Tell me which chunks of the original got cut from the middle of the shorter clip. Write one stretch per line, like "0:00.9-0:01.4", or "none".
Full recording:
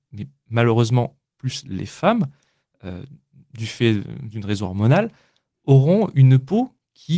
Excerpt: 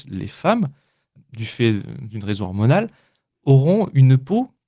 0:02.7-0:03.4